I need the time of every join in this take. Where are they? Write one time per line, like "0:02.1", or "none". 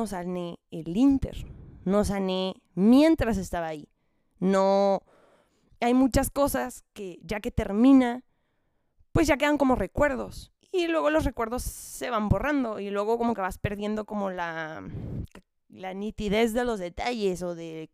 none